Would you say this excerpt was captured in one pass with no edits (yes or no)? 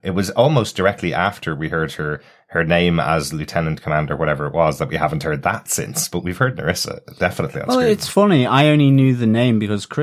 yes